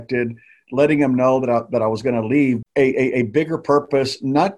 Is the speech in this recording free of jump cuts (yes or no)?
no